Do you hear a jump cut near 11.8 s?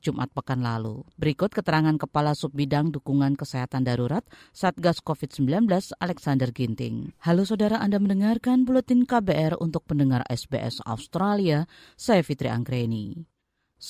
no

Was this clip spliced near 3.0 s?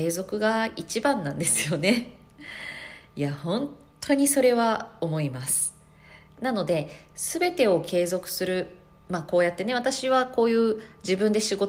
no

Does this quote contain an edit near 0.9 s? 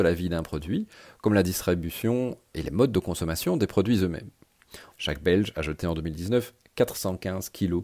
no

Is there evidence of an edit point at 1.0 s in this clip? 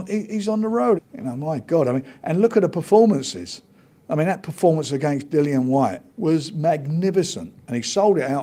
yes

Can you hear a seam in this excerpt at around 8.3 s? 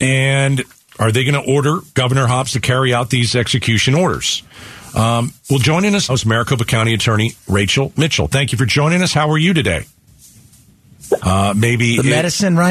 no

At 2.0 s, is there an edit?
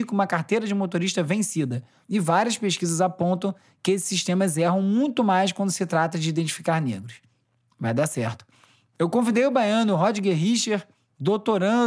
yes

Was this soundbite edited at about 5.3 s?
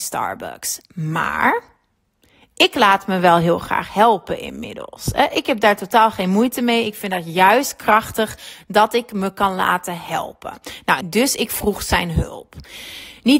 no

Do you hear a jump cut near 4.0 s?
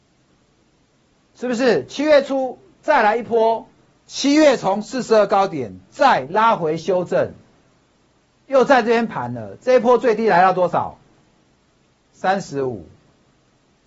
yes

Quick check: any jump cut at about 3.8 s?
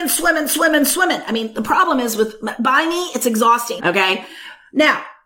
yes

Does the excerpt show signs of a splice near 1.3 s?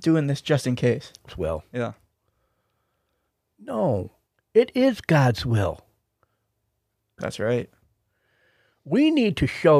yes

